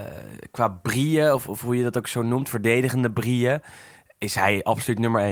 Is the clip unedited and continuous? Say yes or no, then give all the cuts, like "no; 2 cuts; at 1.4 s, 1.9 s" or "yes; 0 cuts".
yes; 0 cuts